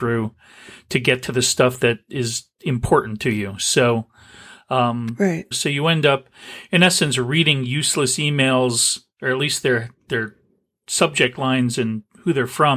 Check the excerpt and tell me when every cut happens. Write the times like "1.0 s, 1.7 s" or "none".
5.5 s

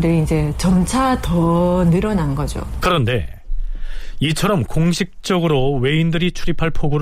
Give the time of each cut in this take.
2.8 s

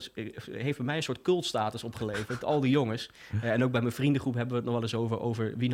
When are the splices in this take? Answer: none

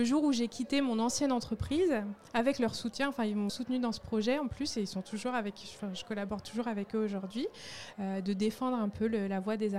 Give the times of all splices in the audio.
3.5 s, 7.9 s

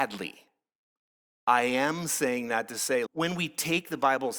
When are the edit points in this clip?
3.1 s

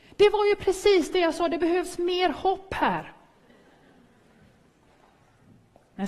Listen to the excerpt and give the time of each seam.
none

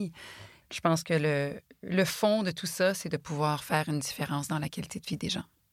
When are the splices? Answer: none

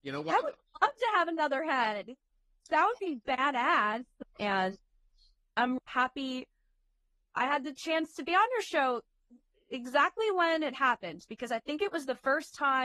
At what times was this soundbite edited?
4.2 s, 5.8 s

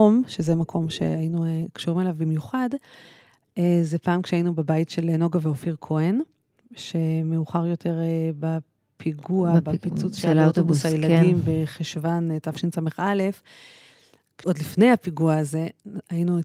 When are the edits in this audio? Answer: 14.4 s

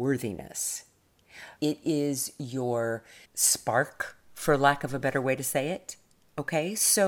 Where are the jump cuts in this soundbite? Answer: 1.6 s, 3.2 s

